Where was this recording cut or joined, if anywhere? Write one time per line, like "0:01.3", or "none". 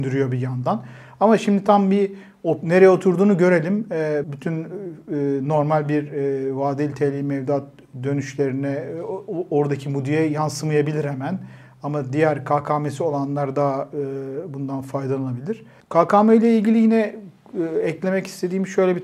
0:04.2
0:15.8